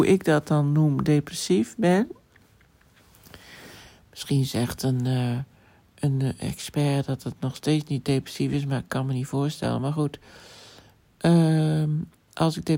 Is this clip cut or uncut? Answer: uncut